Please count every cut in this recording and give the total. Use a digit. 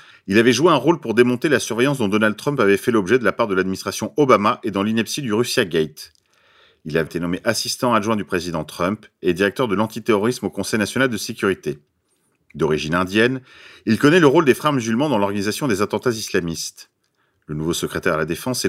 1